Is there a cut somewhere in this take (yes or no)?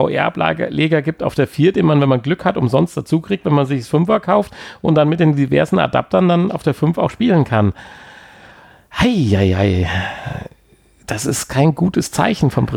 no